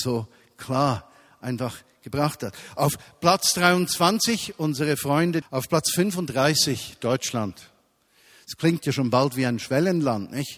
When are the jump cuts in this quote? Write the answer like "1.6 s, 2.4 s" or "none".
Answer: 5.4 s